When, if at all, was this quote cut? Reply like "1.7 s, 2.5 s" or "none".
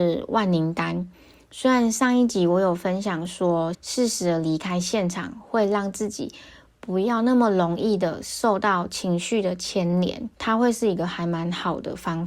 3.7 s, 10.3 s